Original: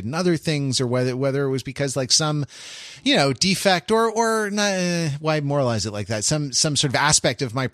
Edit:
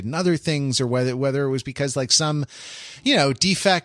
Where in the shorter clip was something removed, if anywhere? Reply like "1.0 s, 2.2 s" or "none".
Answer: none